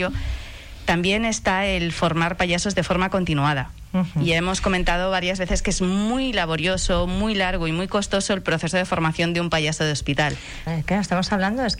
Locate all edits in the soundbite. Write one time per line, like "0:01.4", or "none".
0:10.7